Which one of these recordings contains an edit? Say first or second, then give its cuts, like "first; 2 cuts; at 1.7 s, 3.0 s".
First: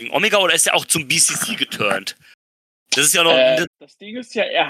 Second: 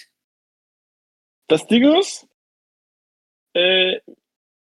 first; 1 cut; at 3.7 s